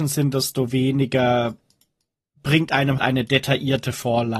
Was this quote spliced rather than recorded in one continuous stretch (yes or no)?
yes